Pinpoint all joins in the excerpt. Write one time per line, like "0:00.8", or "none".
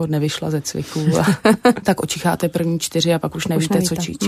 0:01.8